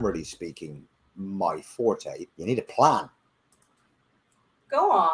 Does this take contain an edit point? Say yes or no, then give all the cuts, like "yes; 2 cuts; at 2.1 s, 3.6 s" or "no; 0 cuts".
yes; 1 cut; at 2.3 s